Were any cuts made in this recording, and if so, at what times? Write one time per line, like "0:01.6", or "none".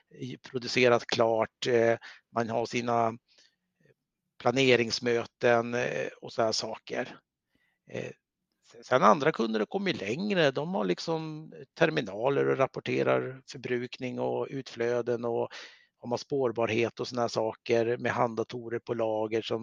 none